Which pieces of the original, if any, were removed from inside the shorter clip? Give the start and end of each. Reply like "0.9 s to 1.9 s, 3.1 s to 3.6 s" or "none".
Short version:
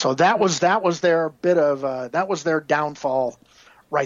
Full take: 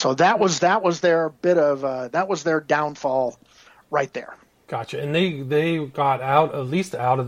none